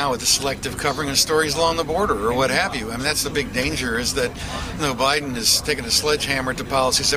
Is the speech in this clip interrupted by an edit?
yes; 1 cut; at 4.8 s

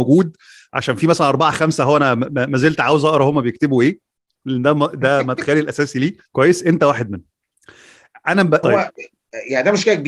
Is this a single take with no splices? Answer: no; 2 cuts; at 6.3 s, 8.6 s

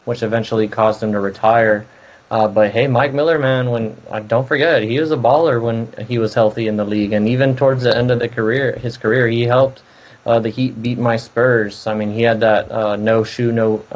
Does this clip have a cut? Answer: no; 0 cuts

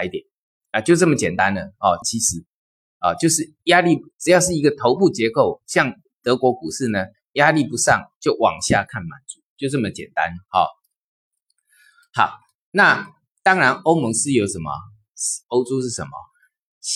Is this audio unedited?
no; 2 cuts; at 2.0 s, 15.4 s

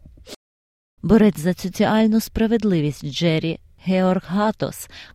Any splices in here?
yes; 1 cut; at 1.0 s

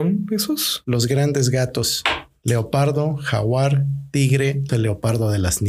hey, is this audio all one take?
no; 1 cut; at 4.7 s

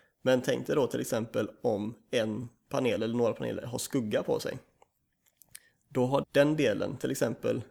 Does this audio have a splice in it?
yes; 1 cut; at 6.2 s

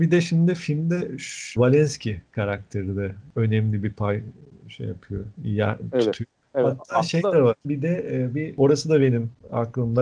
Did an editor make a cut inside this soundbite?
yes; 2 cuts; at 1.6 s, 7.6 s

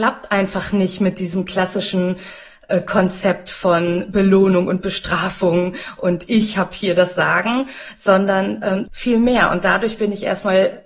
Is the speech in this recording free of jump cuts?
no; 1 cut; at 8.9 s

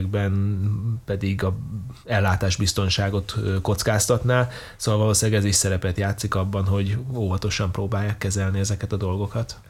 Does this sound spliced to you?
no; 0 cuts

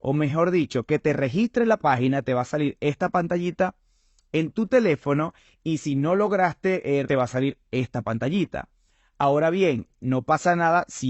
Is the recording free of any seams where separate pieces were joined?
no; 1 cut; at 7.0 s

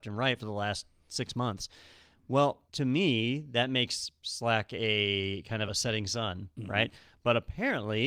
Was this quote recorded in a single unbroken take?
no; 2 cuts; at 2.7 s, 5.7 s

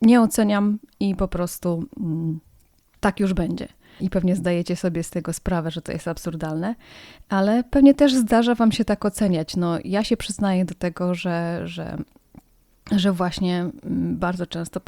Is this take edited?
yes; 1 cut; at 4.0 s

